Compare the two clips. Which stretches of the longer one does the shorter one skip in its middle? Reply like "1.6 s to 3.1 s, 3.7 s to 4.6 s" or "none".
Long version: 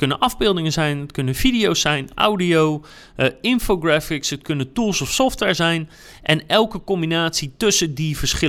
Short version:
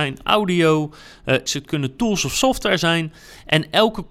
3.4 s to 4.2 s